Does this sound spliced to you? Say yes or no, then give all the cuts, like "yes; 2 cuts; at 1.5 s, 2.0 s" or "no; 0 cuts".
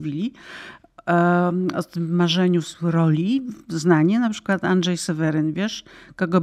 no; 0 cuts